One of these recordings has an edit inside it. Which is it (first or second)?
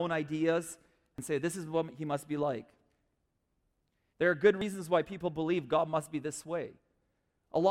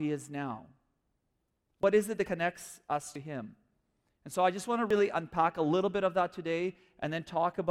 first